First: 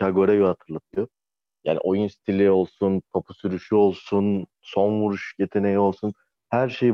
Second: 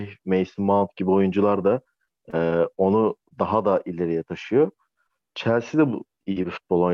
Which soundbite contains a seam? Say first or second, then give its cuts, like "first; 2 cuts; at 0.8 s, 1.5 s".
first; 1 cut; at 3.0 s